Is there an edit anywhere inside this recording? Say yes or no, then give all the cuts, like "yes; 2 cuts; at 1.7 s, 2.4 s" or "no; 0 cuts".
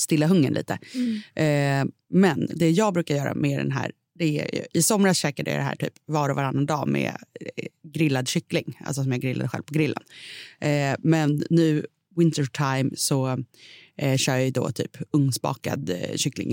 no; 0 cuts